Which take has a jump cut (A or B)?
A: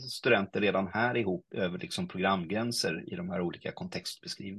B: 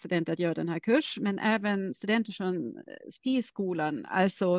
A